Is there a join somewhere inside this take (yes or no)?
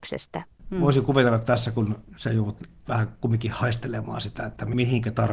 no